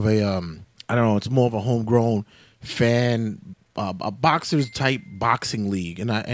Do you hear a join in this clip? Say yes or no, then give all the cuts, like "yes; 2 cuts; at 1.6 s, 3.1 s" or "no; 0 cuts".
no; 0 cuts